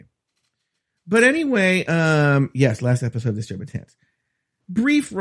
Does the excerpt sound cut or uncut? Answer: uncut